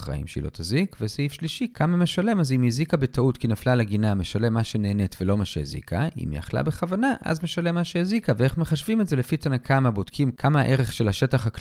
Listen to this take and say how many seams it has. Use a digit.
0